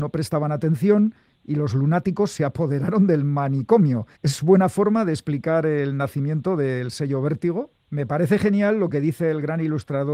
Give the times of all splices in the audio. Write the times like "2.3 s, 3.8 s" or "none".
4.2 s, 7.9 s